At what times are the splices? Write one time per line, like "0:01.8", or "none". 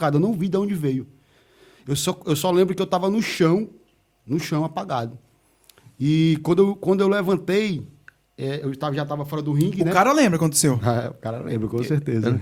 none